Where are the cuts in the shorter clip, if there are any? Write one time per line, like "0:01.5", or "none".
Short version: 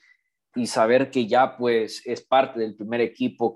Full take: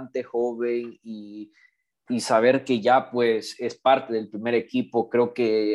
none